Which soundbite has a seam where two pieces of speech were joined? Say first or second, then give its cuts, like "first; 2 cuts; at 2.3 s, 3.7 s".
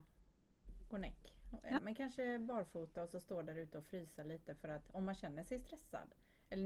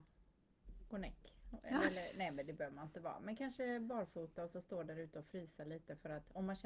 first; 1 cut; at 1.8 s